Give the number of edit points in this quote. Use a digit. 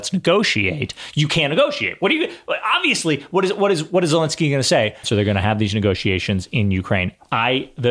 1